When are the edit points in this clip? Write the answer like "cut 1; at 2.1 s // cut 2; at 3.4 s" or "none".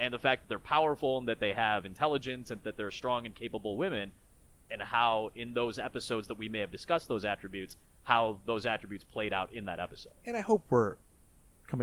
cut 1; at 4.7 s